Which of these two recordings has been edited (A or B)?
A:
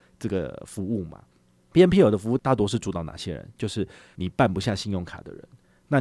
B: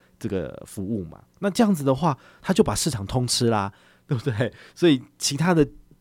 B